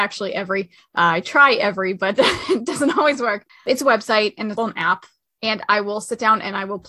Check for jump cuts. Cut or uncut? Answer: cut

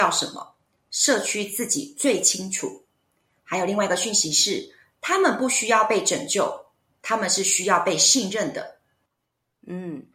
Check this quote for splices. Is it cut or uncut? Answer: uncut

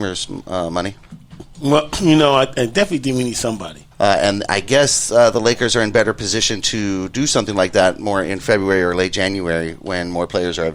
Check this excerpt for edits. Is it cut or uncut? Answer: cut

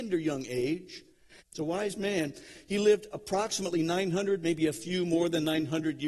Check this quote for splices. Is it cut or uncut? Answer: cut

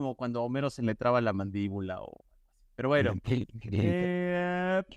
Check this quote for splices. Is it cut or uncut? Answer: uncut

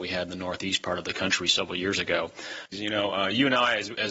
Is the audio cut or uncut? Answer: cut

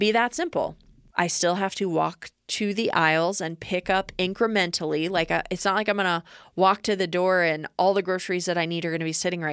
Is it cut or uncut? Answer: cut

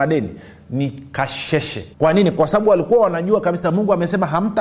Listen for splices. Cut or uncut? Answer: cut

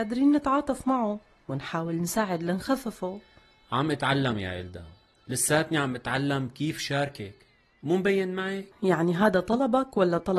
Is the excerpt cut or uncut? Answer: cut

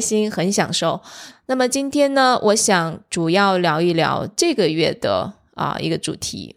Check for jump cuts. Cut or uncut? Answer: cut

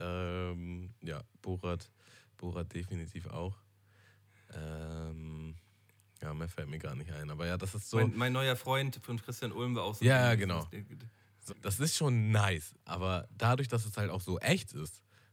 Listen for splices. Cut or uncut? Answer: cut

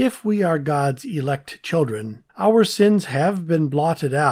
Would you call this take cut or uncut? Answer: cut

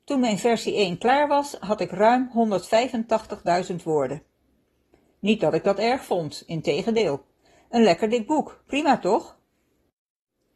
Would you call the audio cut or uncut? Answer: uncut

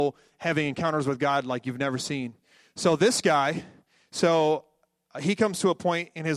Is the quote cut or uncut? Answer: uncut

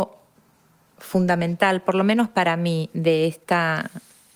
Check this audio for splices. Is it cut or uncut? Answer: uncut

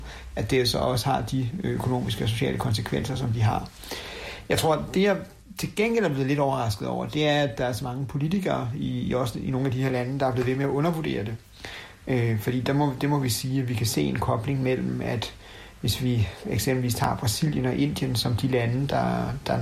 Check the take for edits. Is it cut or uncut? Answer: uncut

